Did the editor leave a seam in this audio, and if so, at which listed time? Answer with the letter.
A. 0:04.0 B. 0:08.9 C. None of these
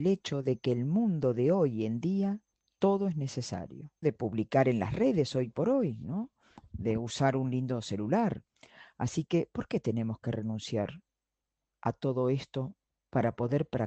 A